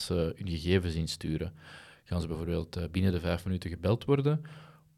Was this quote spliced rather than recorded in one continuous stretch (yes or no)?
no